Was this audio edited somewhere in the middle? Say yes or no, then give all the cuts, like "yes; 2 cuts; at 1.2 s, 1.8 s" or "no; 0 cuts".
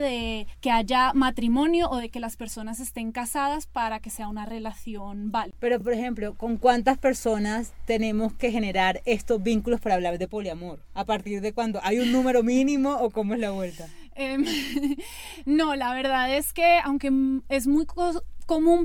no; 0 cuts